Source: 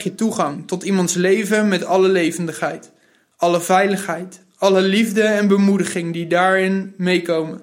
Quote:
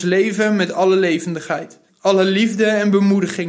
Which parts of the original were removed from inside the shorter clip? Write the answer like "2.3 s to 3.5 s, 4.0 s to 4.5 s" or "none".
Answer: 3.0 s to 4.5 s